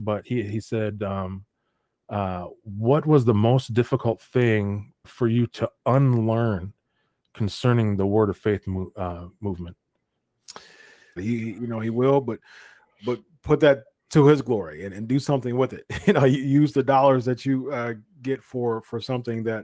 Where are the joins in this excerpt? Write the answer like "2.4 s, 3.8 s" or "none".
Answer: 5.0 s, 11.2 s